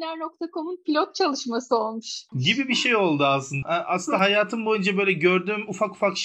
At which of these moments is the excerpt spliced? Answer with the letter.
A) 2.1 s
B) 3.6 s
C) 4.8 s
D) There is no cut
B